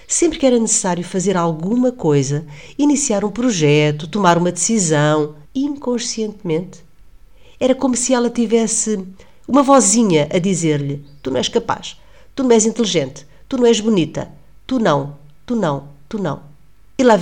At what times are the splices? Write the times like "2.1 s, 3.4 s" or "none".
5.4 s